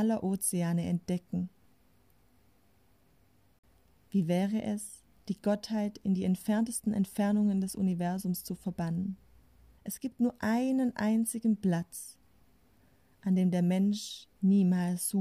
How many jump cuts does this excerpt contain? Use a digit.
1